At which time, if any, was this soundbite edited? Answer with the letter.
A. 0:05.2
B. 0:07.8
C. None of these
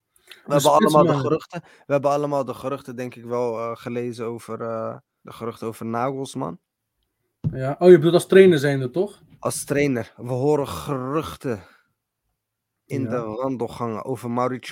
A